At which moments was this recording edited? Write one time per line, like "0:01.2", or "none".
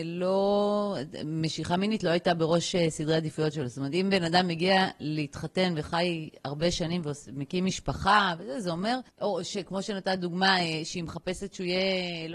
none